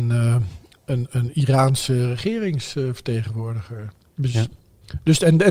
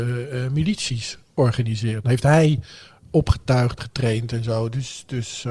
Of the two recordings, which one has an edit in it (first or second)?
second